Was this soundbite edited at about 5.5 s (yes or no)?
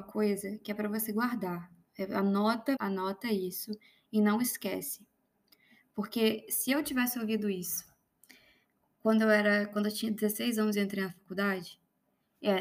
no